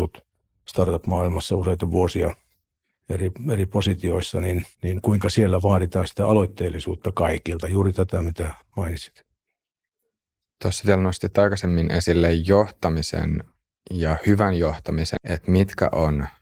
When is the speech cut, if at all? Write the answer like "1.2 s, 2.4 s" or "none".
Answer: 4.7 s, 15.2 s